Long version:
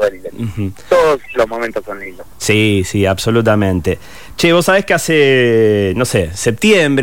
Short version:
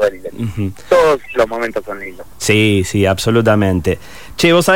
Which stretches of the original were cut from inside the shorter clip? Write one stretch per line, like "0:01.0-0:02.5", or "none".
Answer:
none